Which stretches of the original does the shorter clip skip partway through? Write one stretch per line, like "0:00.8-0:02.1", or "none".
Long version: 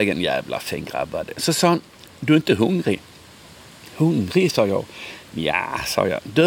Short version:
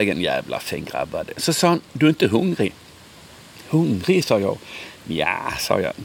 0:01.9-0:02.2